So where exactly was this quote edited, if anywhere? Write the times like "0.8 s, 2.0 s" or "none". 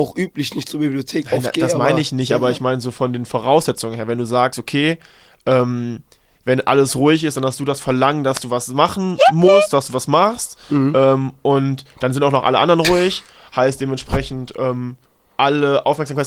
none